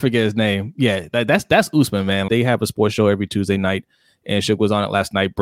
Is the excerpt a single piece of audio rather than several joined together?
no; 1 cut; at 2.3 s

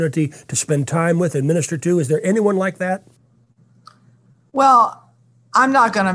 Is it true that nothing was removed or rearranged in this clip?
yes; 0 cuts

